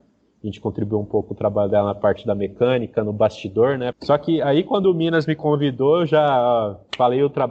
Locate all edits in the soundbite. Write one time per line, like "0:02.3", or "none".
0:03.9